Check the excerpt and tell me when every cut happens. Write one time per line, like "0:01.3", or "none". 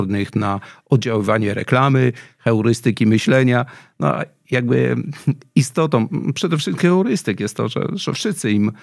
none